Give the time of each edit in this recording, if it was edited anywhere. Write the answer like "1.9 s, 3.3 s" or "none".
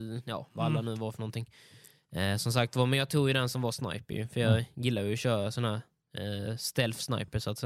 none